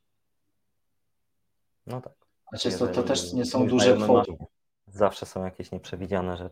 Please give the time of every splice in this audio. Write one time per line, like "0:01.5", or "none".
0:04.2